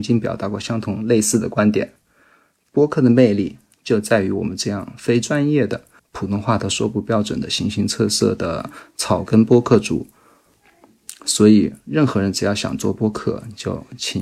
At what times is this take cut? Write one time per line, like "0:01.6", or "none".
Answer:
0:06.0